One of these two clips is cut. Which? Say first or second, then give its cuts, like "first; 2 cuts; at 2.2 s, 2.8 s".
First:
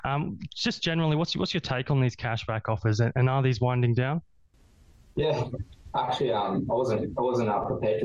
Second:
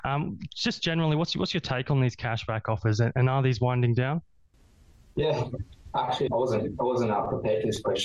second; 1 cut; at 6.3 s